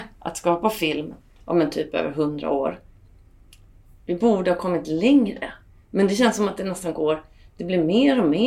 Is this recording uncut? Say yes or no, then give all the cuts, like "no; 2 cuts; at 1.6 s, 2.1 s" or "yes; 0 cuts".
yes; 0 cuts